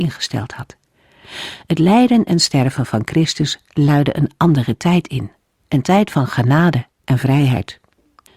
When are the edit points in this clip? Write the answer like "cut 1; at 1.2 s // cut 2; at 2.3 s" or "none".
none